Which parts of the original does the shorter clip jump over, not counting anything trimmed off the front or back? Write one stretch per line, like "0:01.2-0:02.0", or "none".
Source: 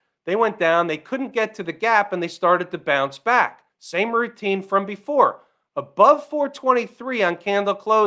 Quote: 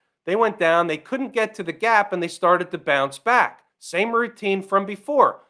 none